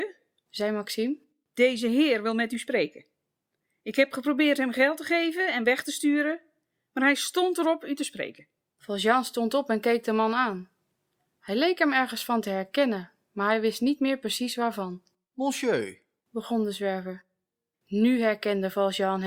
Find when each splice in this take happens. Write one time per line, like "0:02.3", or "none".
0:17.7